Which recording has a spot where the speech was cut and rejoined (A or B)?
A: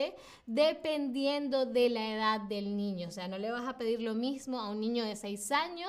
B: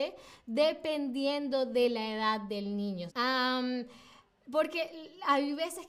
B